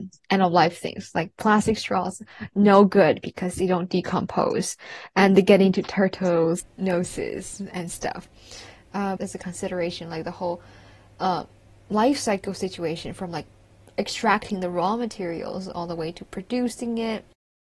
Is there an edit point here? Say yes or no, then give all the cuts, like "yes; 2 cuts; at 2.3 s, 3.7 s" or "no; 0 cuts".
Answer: yes; 1 cut; at 9.2 s